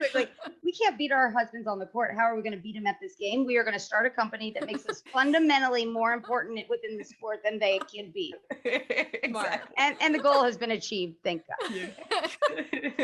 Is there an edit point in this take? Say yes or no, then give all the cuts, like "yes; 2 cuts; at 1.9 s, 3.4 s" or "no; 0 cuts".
no; 0 cuts